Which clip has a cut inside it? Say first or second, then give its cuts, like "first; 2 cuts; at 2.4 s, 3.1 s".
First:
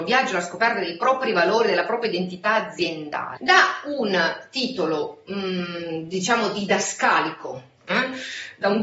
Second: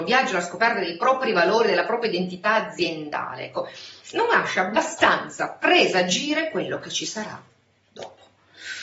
first; 1 cut; at 3.4 s